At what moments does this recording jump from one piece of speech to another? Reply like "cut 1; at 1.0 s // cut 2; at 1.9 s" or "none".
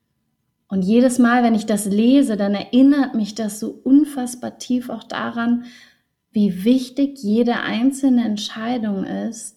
none